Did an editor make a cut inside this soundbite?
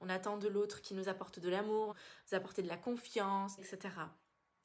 yes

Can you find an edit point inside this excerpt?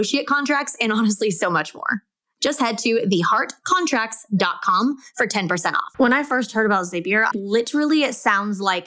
yes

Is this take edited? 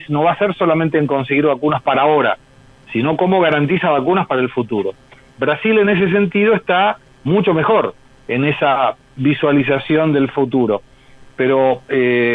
no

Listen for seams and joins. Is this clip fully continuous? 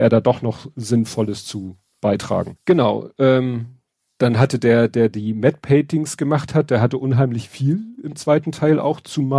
no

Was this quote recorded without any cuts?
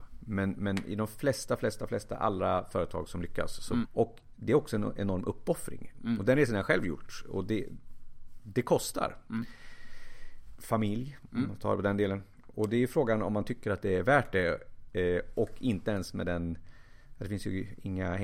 no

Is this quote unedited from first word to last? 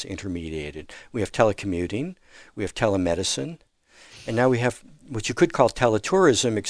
yes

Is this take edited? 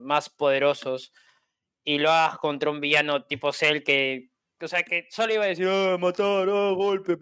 no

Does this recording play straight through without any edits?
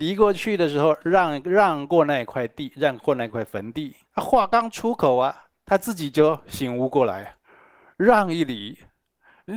no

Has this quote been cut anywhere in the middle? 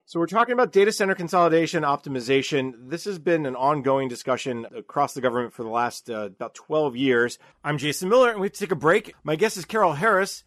yes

